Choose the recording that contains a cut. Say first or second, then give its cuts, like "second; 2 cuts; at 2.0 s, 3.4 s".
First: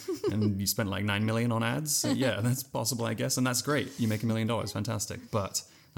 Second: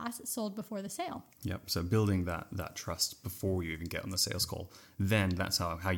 second; 1 cut; at 1.3 s